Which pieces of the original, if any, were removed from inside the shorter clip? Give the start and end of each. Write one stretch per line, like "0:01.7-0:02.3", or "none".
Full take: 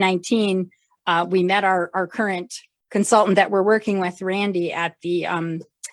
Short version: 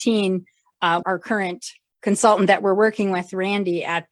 0:01.3-0:01.9